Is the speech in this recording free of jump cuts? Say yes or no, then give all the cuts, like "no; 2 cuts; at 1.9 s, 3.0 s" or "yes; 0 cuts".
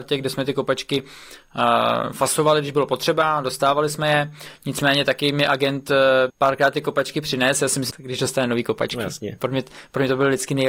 no; 2 cuts; at 6.3 s, 7.9 s